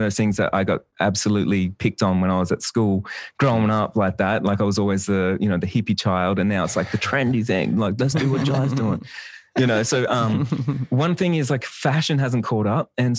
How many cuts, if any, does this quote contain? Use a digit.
0